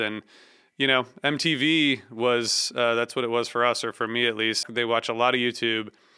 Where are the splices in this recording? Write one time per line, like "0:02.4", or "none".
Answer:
0:04.6